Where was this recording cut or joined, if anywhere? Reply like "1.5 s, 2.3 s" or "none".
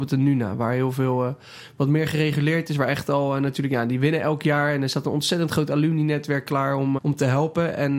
7.0 s